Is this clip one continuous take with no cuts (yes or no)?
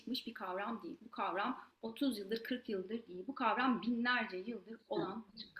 yes